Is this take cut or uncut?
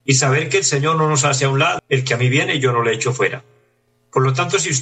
cut